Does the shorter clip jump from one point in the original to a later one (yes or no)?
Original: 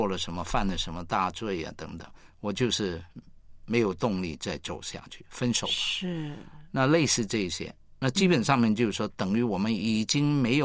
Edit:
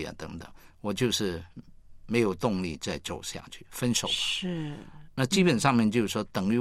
yes